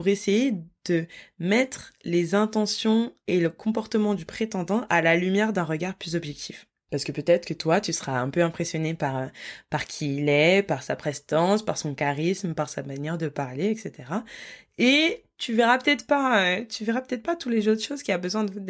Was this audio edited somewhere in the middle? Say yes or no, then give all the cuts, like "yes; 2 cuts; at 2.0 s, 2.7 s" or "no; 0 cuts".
no; 0 cuts